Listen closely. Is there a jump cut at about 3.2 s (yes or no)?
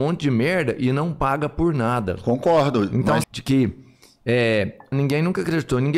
yes